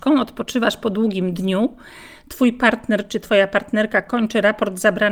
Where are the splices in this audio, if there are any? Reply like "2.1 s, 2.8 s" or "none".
none